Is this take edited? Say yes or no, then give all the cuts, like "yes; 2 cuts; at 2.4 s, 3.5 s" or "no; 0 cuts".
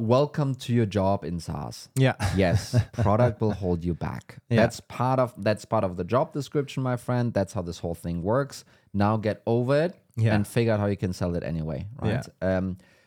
no; 0 cuts